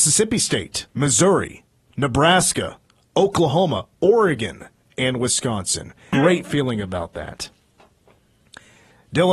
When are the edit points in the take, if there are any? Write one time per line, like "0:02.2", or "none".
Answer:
0:00.9
0:04.8
0:06.1